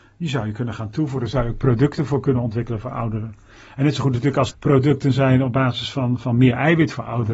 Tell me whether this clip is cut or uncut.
cut